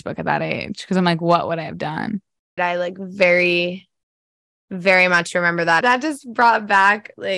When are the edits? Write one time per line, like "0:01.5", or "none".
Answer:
0:02.6
0:05.8